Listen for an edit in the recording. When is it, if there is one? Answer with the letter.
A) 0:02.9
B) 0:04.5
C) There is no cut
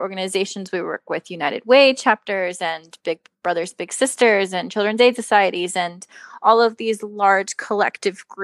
C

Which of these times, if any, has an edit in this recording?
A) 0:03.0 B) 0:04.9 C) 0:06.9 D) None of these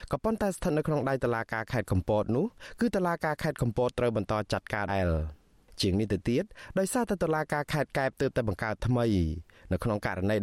B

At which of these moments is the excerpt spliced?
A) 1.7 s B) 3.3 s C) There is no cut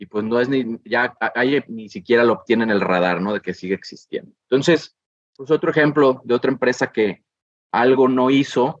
A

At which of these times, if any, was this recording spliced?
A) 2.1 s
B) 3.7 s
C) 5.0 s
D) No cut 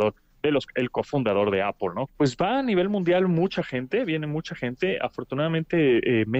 A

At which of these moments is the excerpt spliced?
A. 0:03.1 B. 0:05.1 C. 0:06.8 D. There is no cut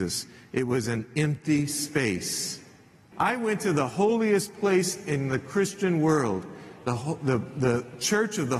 A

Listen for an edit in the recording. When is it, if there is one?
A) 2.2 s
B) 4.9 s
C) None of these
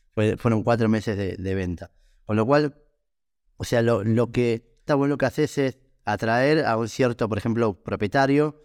B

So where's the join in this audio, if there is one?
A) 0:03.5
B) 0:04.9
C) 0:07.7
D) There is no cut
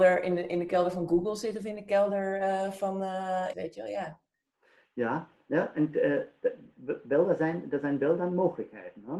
A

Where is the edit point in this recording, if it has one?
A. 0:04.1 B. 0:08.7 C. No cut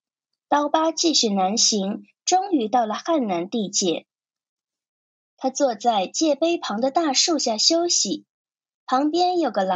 C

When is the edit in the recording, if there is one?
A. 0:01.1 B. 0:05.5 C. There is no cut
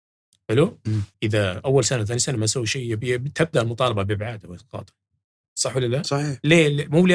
A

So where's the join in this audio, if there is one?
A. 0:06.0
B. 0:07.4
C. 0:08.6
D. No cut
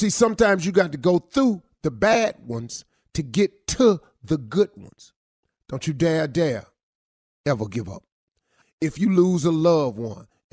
C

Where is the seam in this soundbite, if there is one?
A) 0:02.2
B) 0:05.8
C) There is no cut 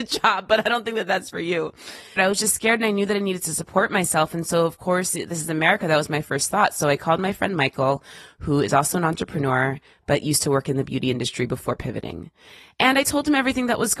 A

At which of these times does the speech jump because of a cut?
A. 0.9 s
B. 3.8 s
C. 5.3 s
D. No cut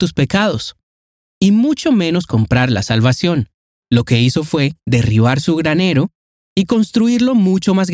B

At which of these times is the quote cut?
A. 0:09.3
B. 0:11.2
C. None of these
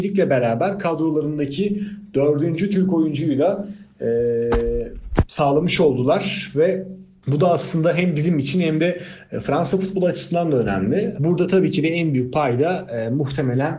B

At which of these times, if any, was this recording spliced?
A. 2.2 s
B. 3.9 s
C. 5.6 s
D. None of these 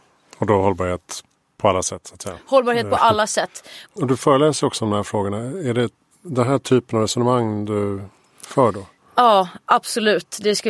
B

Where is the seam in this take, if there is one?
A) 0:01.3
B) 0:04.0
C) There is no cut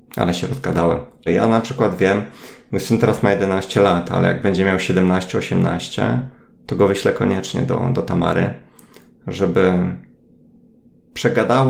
A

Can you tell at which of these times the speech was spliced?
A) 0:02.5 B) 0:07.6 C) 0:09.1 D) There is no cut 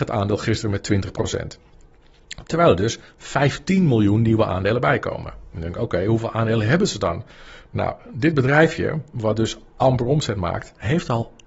D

